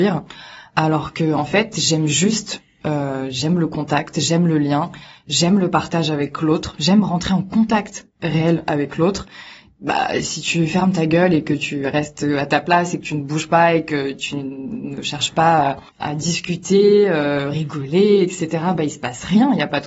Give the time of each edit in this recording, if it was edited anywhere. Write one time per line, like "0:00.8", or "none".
0:15.9